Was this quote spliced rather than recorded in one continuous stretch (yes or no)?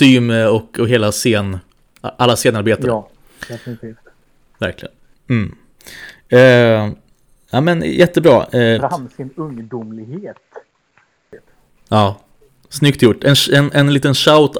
yes